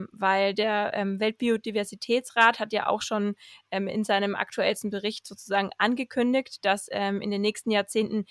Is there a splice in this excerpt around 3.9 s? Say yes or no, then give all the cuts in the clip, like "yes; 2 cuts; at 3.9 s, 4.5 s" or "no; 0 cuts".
no; 0 cuts